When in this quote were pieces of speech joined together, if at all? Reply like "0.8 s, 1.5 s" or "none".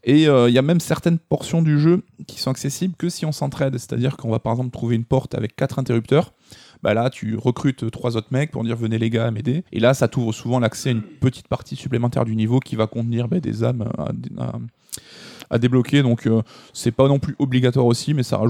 9.7 s